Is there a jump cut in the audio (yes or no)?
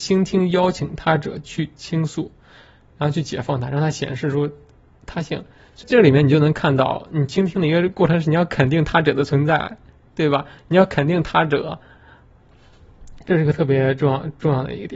yes